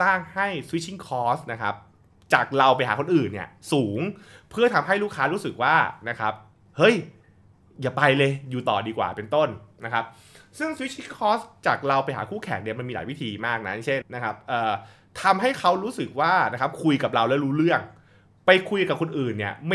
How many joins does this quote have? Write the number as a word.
one